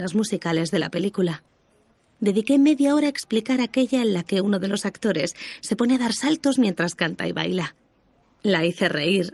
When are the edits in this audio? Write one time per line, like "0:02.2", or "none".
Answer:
none